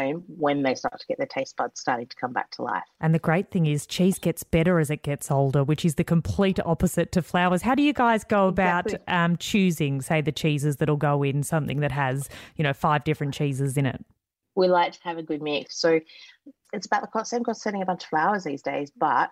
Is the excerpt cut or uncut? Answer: cut